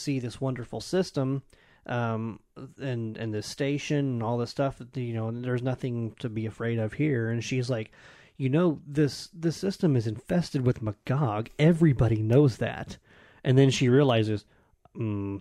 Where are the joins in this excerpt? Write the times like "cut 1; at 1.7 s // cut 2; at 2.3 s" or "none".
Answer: none